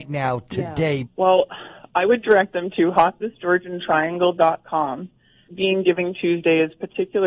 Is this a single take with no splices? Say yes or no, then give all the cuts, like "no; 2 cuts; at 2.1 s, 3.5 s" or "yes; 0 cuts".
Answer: no; 2 cuts; at 1.0 s, 5.5 s